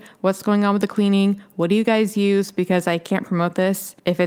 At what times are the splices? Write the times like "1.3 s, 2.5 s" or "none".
none

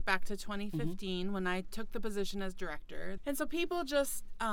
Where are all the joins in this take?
3.2 s

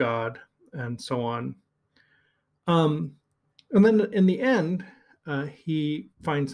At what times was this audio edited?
none

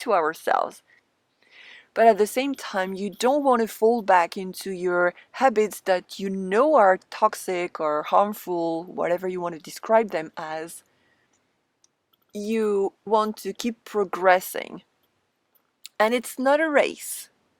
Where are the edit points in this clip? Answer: 13.1 s

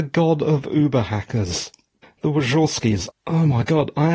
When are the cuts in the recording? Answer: 2.0 s, 3.1 s

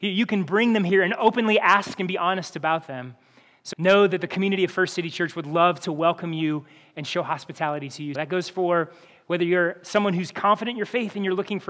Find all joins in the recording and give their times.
3.7 s, 8.1 s

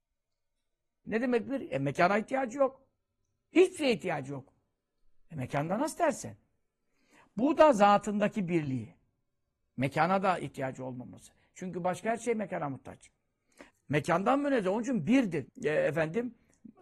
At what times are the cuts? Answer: 1.0 s, 13.7 s, 15.5 s

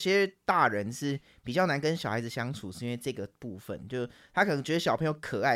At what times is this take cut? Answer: none

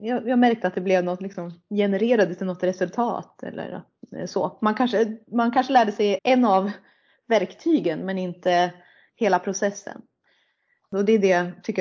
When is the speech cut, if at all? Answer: 6.2 s

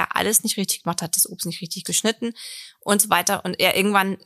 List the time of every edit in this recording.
1.1 s

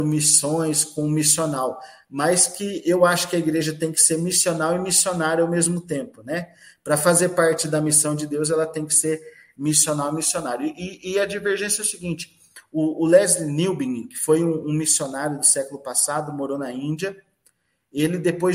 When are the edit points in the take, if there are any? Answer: none

